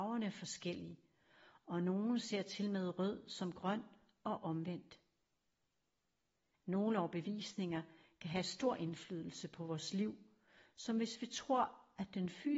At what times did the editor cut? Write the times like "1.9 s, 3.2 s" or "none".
6.5 s